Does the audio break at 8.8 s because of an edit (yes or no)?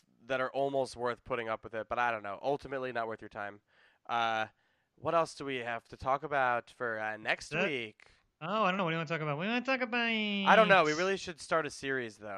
no